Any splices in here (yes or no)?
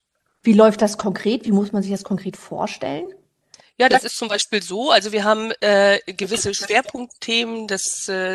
no